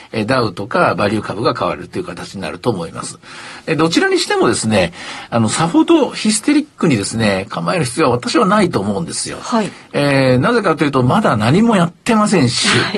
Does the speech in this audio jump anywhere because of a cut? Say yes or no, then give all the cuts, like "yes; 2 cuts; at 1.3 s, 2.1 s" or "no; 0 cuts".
no; 0 cuts